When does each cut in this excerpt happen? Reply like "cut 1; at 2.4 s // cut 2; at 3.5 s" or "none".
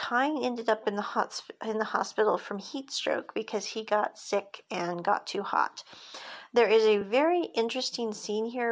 none